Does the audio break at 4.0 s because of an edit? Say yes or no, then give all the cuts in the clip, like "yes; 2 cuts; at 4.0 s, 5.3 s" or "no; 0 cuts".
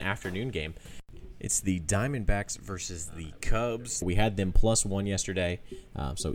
yes; 1 cut; at 4.0 s